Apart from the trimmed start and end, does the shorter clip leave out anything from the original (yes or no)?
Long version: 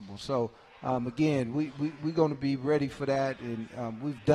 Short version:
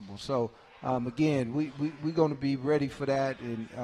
no